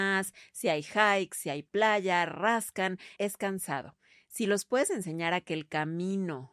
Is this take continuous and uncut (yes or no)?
no